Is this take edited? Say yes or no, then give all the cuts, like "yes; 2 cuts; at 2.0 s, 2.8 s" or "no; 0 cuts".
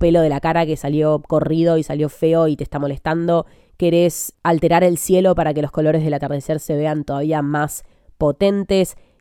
yes; 1 cut; at 4.3 s